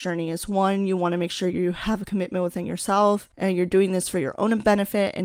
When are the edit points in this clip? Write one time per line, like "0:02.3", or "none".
none